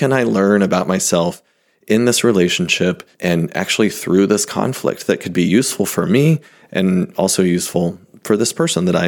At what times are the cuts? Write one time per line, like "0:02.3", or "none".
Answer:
0:03.1

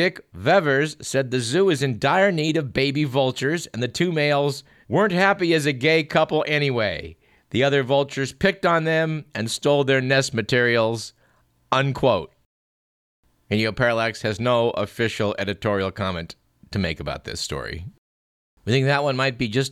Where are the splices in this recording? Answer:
0:04.8

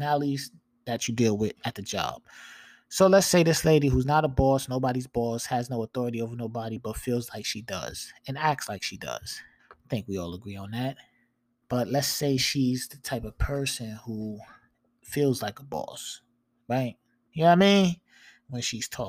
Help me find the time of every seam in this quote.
0:09.6
0:11.6
0:17.3

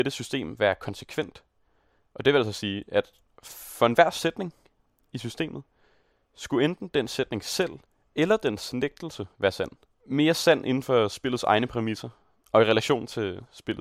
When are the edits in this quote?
0:10.0

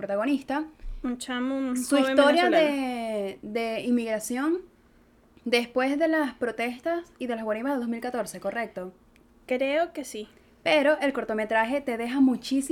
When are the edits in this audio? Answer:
none

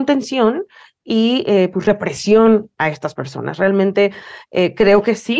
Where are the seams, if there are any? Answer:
none

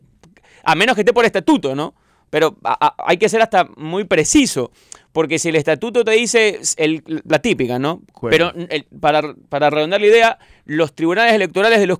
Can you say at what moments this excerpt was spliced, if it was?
0:08.2

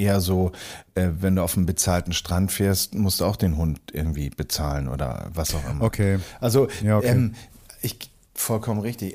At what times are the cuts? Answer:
none

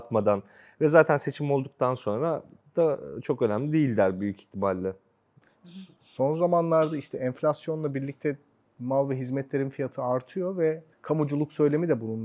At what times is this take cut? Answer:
0:10.9

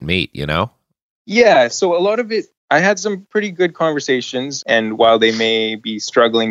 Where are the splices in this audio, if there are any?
0:02.6
0:04.6

